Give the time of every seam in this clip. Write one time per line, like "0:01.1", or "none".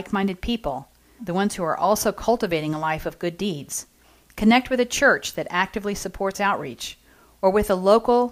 0:01.2

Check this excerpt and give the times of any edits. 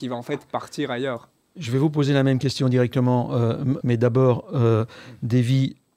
0:03.8

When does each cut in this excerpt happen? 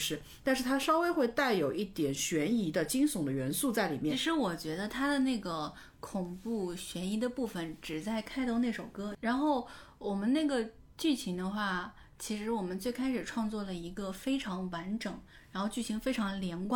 none

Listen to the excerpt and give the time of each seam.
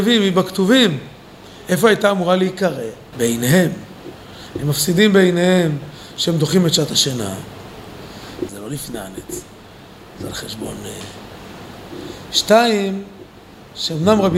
0:03.1
0:08.5

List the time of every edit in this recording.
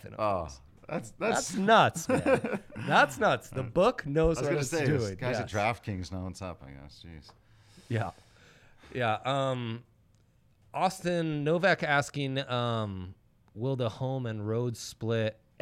none

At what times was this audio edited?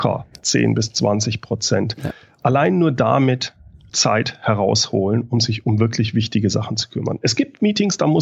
0:03.9

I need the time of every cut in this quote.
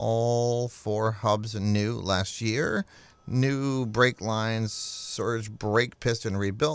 none

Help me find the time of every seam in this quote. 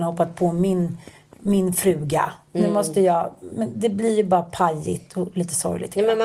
none

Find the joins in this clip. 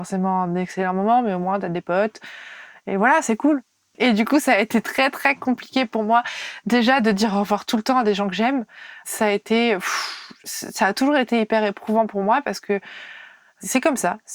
0:03.9

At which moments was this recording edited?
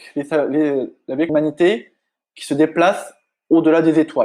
0:01.3

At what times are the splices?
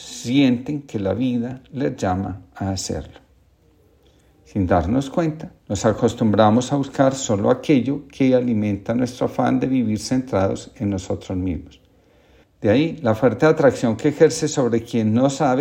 0:05.6
0:12.4

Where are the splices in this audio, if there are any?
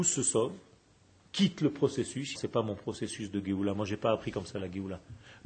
0:02.3

